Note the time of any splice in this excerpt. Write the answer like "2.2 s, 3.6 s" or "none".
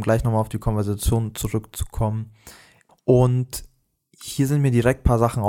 2.9 s